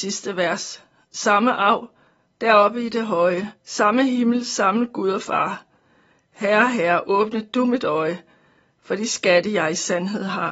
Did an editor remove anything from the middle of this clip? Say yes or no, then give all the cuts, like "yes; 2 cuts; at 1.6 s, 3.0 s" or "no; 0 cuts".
yes; 1 cut; at 3.6 s